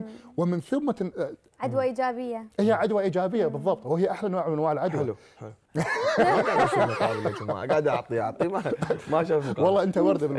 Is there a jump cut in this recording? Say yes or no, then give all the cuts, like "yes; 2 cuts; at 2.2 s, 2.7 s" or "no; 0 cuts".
yes; 2 cuts; at 1.5 s, 5.7 s